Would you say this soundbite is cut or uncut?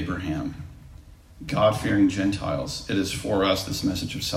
uncut